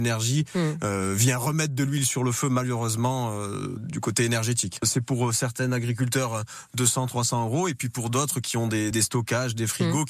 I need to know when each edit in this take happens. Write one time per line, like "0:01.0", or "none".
0:03.8

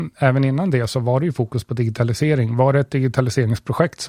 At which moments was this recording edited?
none

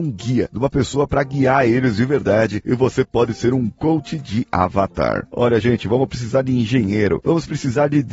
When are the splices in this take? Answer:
0:07.2

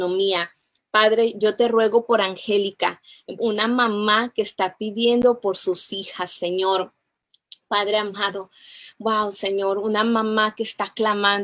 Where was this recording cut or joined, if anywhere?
0:03.4

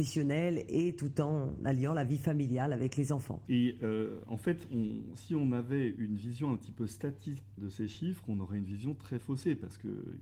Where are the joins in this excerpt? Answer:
0:03.5
0:07.6

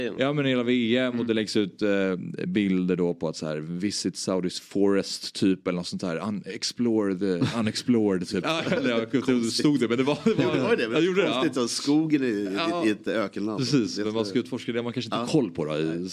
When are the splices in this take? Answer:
0:08.4

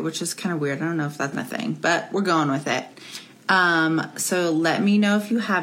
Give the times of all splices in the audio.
0:01.3

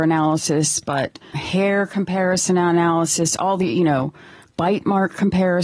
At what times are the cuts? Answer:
0:01.3

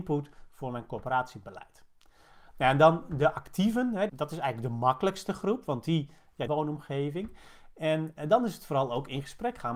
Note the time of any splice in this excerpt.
0:04.1
0:06.5

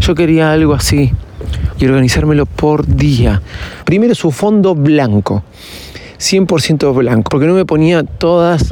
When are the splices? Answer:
0:01.7
0:03.8
0:07.3

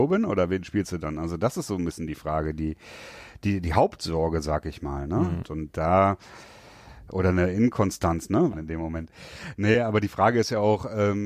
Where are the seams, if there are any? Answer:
0:05.4
0:08.5

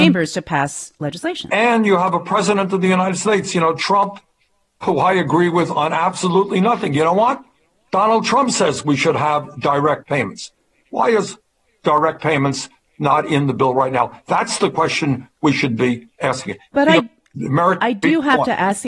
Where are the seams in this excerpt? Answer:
0:04.8
0:10.8
0:16.7

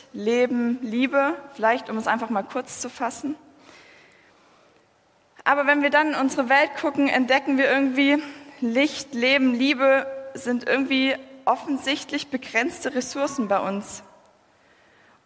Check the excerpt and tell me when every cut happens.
none

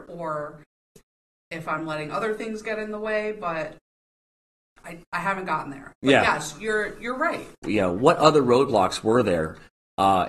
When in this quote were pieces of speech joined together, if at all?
0:07.6

